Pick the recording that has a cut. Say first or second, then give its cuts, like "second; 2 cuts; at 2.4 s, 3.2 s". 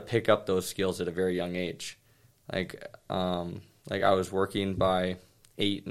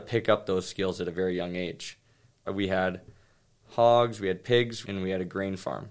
second; 2 cuts; at 2.5 s, 4.9 s